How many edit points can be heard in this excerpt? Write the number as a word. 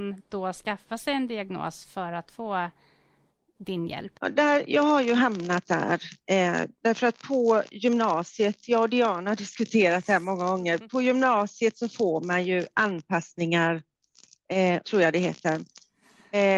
two